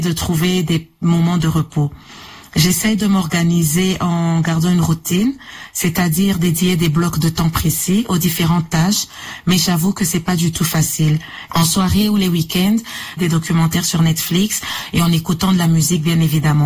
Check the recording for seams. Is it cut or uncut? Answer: cut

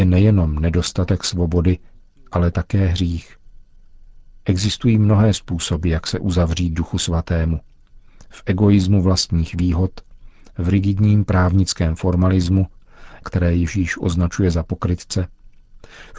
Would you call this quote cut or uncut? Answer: cut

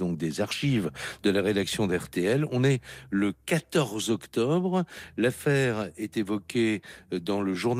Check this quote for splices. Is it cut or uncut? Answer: uncut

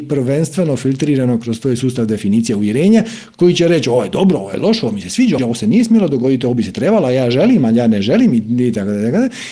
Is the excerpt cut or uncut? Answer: cut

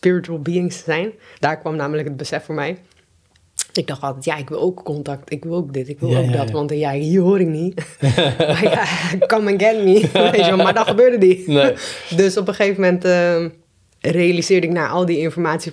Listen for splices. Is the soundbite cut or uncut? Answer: uncut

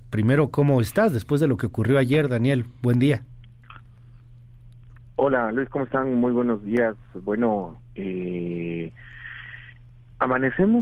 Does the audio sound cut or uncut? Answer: uncut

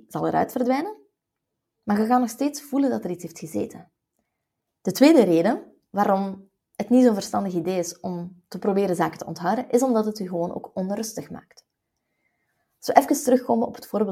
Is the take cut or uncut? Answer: cut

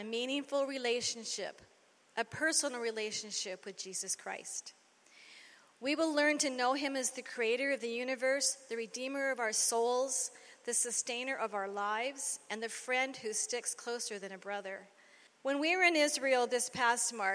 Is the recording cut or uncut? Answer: cut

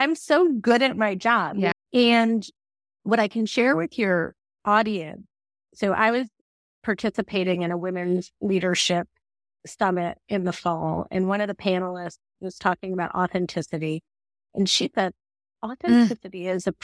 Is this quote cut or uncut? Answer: cut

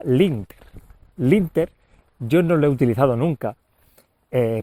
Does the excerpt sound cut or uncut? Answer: uncut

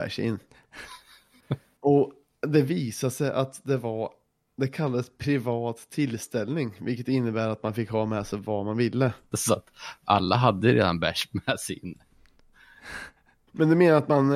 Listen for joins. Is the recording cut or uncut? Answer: cut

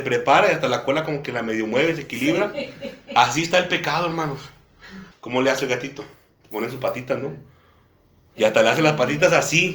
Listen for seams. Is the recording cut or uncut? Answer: cut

